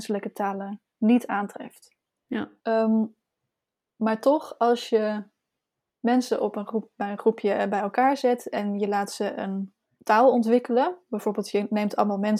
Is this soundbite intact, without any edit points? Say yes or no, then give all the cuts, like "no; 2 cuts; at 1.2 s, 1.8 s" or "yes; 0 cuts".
no; 1 cut; at 2.6 s